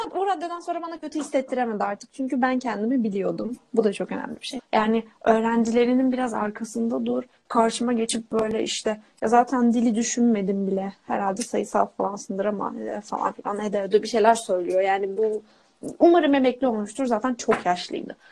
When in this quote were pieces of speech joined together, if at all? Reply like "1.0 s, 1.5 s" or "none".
4.6 s